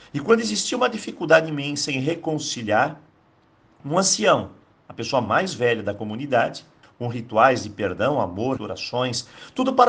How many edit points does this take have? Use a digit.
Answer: 2